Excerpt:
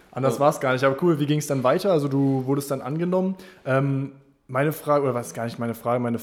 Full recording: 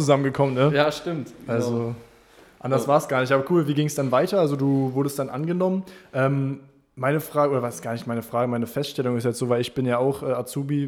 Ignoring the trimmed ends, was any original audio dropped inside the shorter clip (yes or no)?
no